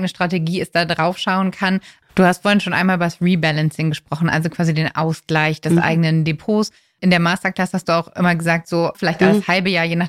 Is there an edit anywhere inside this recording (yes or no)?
yes